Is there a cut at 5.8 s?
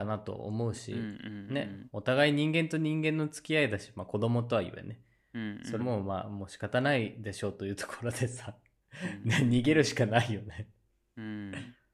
yes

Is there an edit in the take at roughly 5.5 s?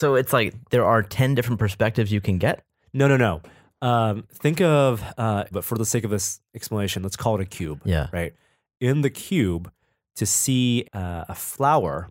yes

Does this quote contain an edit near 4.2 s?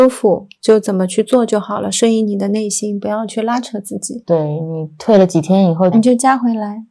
no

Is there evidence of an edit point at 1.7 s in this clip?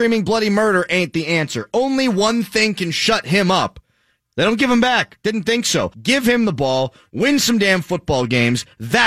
no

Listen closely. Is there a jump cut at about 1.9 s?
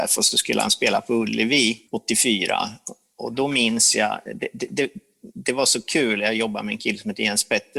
yes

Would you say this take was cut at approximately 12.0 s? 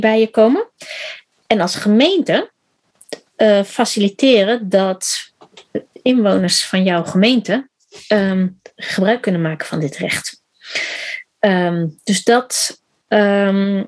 no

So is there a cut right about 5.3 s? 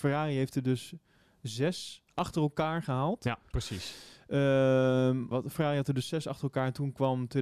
yes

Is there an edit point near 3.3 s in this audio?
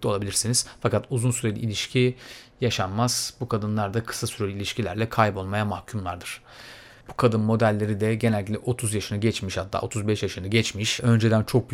no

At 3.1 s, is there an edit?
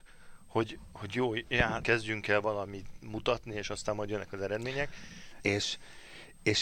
no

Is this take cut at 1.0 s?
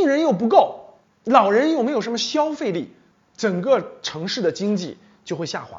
no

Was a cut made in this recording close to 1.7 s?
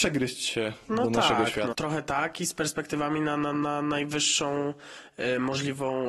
yes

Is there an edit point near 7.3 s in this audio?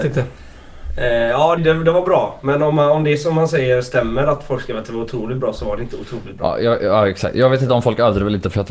no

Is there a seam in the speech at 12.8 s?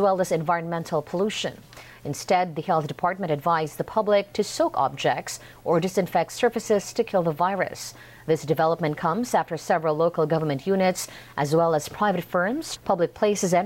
yes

